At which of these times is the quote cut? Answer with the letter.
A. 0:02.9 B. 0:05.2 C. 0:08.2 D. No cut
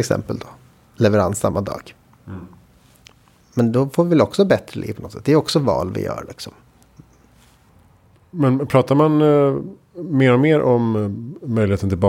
D